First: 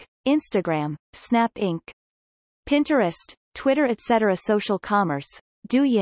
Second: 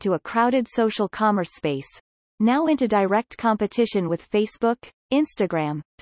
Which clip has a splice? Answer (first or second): second